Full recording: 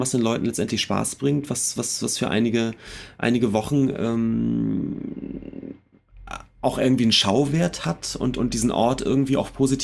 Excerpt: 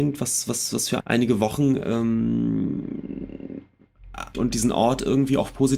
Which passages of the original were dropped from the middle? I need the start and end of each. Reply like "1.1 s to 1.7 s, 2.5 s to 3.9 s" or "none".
2.3 s to 3.1 s, 6.5 s to 8.3 s